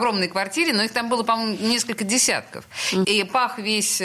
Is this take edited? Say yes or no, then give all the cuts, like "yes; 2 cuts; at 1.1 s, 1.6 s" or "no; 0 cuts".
yes; 1 cut; at 3.0 s